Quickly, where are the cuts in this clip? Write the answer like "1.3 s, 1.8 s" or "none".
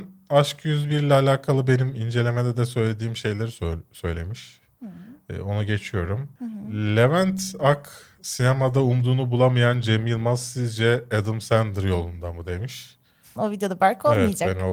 13.4 s